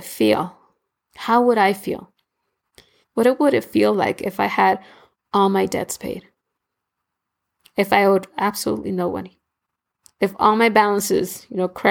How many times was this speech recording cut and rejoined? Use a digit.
2